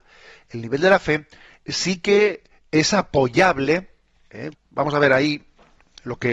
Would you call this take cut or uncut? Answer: cut